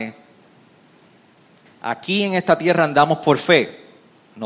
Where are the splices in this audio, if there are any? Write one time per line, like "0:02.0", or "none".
0:01.7